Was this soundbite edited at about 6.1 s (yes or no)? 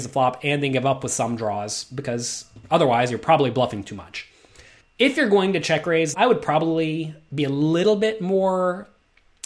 yes